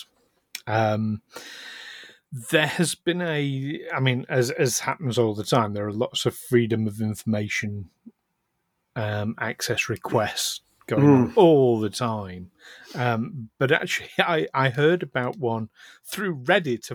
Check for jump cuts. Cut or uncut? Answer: uncut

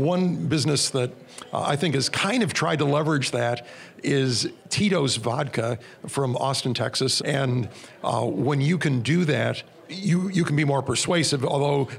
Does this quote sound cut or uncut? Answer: cut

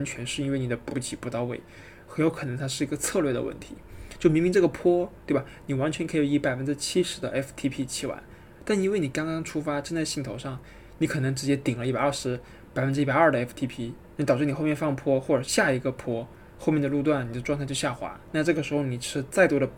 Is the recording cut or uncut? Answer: cut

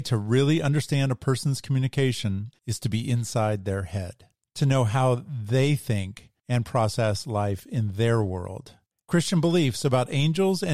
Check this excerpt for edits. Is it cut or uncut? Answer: cut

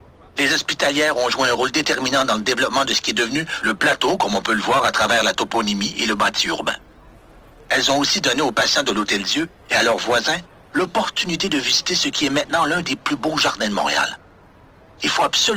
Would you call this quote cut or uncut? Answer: uncut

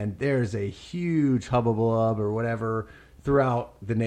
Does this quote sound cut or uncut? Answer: uncut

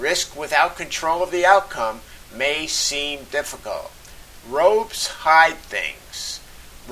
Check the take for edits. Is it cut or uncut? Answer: cut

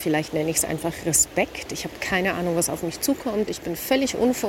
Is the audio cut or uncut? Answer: uncut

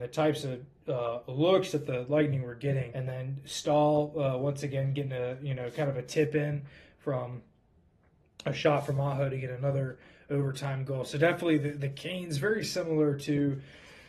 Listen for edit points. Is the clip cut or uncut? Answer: cut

